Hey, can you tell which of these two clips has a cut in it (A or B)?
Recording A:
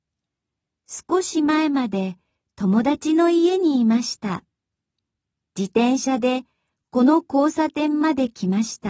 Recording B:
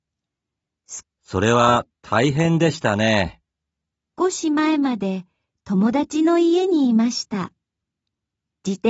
B